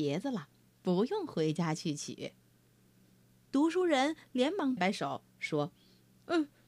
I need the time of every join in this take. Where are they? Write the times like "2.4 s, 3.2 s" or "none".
4.8 s